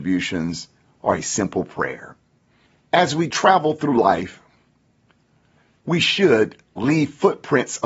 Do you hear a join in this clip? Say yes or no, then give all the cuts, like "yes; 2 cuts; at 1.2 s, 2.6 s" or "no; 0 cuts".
no; 0 cuts